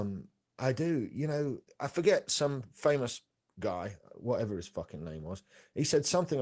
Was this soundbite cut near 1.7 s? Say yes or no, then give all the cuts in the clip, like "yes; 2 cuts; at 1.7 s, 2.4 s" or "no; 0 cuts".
yes; 1 cut; at 1.7 s